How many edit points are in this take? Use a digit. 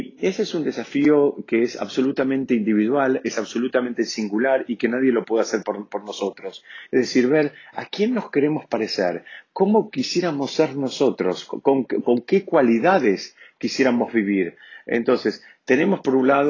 1